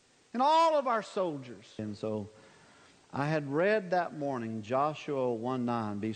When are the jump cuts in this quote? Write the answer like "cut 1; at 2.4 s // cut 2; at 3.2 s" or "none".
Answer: cut 1; at 1.8 s